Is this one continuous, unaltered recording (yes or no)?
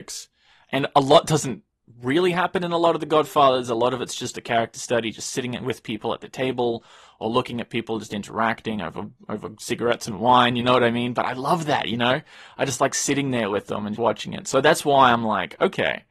no